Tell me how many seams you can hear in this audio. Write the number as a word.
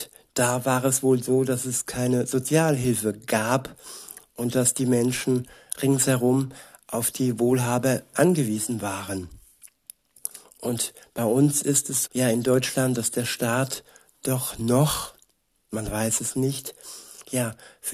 three